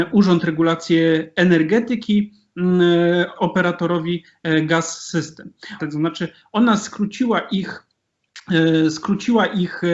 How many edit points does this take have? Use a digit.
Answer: 2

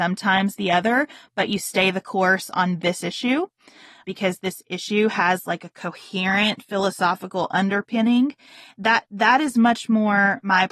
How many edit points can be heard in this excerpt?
0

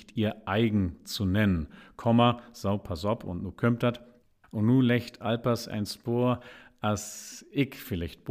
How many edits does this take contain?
1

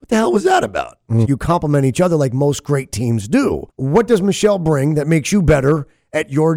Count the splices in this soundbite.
2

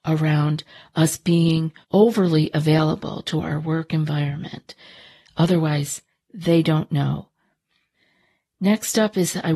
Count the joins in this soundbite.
2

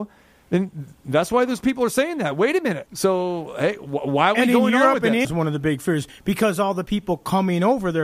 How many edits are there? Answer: 2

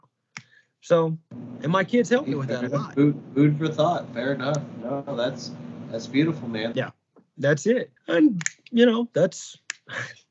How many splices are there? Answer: 2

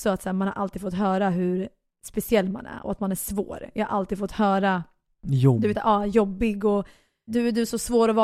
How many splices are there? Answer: 1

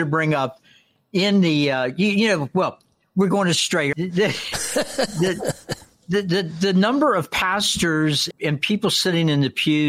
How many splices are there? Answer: 2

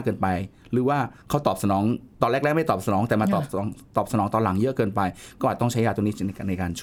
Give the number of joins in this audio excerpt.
1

